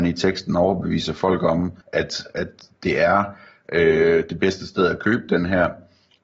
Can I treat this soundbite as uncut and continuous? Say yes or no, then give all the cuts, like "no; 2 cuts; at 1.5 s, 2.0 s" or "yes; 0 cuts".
no; 1 cut; at 1.8 s